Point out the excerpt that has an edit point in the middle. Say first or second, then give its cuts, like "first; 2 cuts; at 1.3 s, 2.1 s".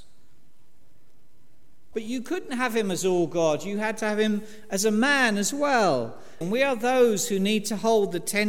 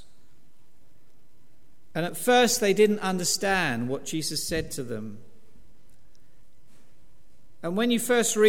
first; 2 cuts; at 1.9 s, 6.4 s